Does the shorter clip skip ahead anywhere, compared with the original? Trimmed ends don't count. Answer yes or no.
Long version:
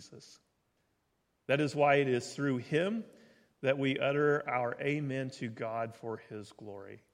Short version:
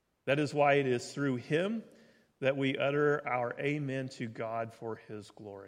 no